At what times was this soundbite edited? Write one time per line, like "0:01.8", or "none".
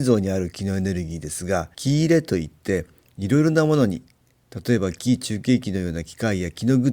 0:01.7